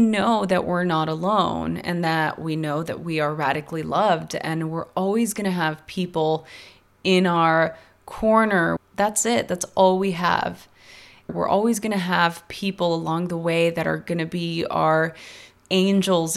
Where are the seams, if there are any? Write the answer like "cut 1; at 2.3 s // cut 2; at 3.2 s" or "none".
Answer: cut 1; at 8.8 s // cut 2; at 11.3 s